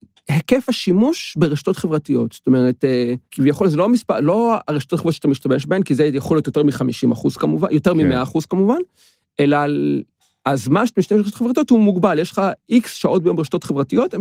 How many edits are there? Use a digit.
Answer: 1